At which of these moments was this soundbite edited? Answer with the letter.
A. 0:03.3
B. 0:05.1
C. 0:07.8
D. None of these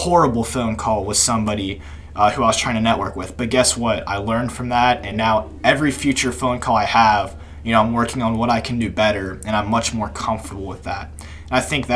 D